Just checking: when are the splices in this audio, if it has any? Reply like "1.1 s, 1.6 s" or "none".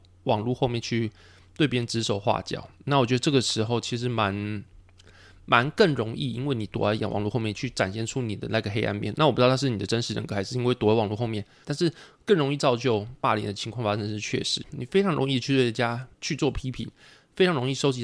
11.6 s, 14.6 s, 16.1 s